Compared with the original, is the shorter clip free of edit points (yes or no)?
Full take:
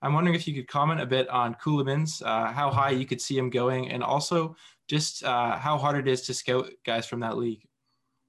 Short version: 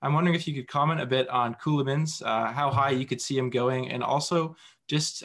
yes